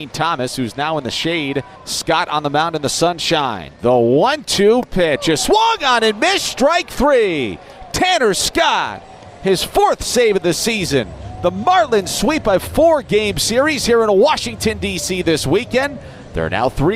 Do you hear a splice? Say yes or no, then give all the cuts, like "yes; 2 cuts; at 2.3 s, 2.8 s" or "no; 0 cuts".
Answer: no; 0 cuts